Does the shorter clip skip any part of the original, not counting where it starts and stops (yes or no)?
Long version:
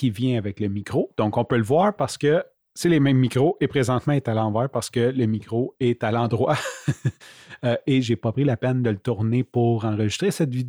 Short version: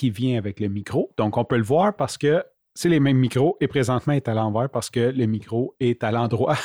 no